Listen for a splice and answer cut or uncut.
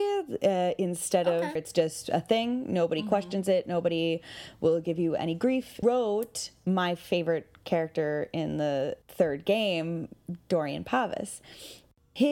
cut